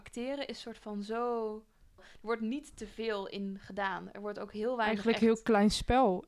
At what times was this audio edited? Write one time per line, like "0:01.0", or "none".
0:02.0